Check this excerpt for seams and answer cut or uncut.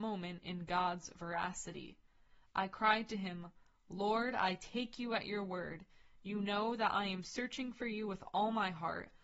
uncut